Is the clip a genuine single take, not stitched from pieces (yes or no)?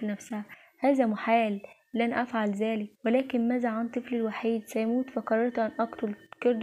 no